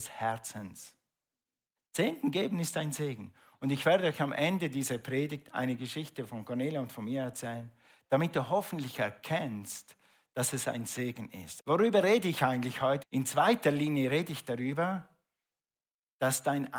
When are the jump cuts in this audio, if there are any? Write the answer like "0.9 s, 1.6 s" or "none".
1.8 s, 11.6 s, 13.0 s